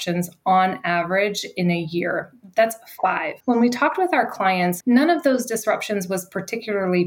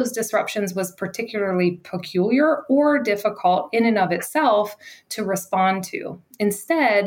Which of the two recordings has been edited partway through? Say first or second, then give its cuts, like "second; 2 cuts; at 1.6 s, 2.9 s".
first; 2 cuts; at 3.4 s, 4.8 s